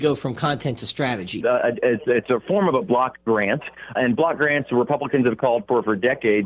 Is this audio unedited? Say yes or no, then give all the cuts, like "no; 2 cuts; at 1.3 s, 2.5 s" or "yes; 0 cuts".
no; 2 cuts; at 1.4 s, 4.0 s